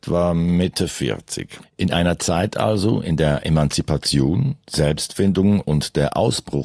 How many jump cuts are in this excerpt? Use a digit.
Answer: 1